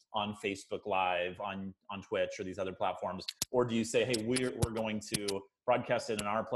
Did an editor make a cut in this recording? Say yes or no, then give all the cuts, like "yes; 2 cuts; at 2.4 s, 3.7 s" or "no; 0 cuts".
no; 0 cuts